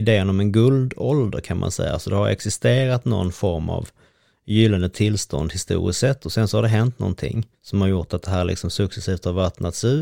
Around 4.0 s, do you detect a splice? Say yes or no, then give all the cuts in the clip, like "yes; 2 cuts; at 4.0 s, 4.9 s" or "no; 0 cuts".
no; 1 cut; at 7.5 s